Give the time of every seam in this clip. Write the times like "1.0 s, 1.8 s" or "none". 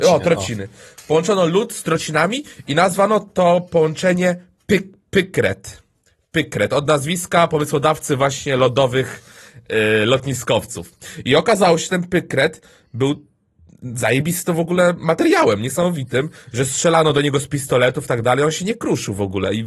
none